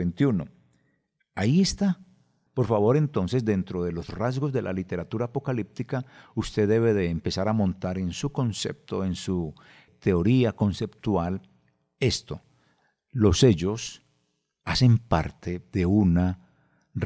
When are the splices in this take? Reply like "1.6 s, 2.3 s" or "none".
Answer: 2.5 s, 9.9 s